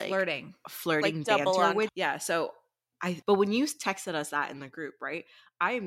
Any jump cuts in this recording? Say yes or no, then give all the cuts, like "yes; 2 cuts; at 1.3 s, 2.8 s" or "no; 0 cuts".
yes; 2 cuts; at 1.9 s, 3.2 s